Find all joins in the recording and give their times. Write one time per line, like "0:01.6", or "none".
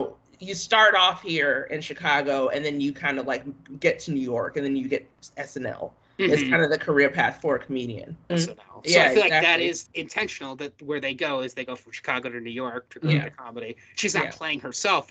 0:08.3
0:09.9